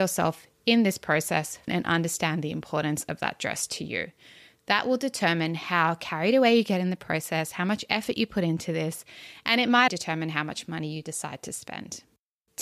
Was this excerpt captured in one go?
no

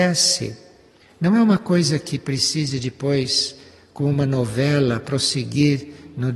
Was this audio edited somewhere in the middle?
no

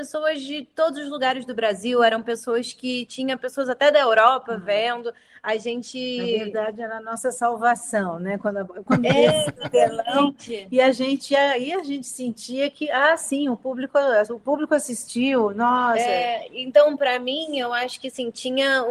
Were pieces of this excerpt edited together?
no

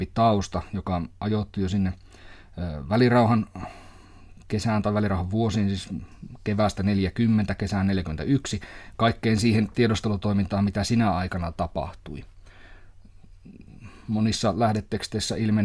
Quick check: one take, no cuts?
yes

